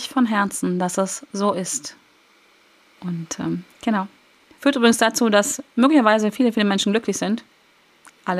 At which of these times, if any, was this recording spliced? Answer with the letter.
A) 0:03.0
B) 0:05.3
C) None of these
A